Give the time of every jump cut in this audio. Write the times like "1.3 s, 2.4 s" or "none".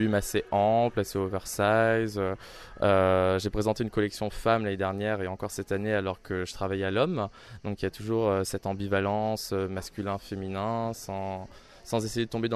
none